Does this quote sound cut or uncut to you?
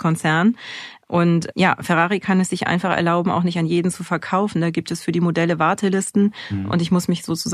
uncut